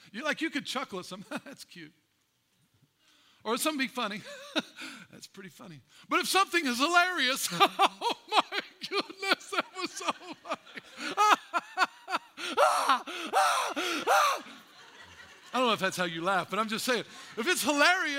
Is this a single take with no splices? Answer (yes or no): yes